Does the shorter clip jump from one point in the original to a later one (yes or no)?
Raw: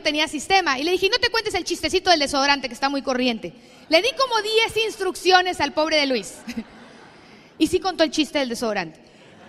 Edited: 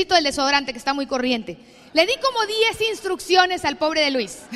no